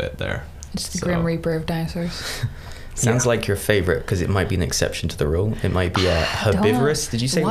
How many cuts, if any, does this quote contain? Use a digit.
0